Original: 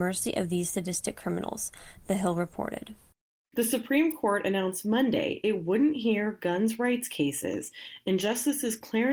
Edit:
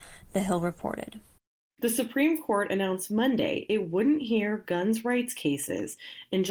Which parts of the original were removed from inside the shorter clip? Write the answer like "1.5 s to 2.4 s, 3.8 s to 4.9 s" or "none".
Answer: none